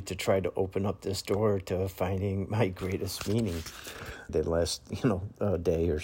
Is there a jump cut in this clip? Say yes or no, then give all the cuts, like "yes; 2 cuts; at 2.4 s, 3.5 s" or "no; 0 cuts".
yes; 1 cut; at 4.3 s